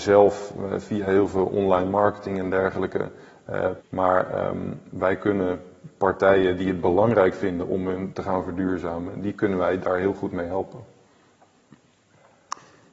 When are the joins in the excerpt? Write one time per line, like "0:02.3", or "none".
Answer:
0:03.8
0:08.1